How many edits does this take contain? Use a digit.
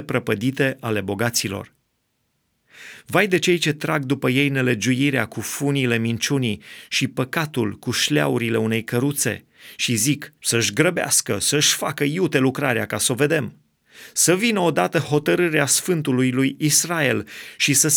1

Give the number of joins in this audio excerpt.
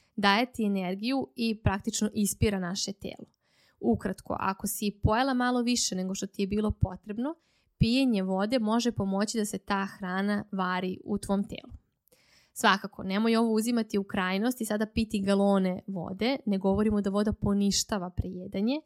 0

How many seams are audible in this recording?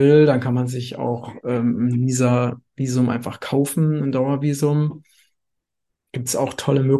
0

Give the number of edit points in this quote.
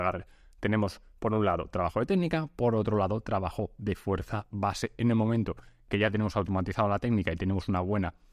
0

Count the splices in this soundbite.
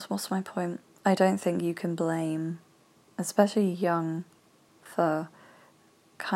1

